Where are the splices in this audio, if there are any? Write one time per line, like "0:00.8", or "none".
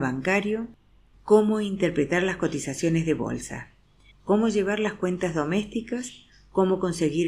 0:04.1